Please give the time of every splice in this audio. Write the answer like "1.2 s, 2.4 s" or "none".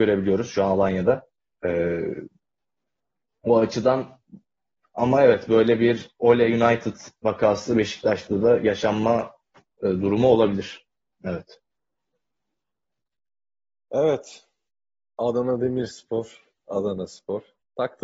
1.5 s